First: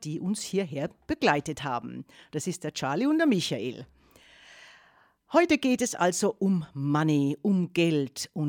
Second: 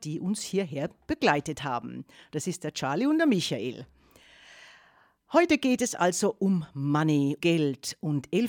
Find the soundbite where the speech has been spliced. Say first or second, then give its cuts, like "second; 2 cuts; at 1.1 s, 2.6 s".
second; 1 cut; at 7.4 s